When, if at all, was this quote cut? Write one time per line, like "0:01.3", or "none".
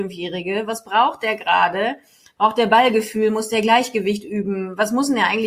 none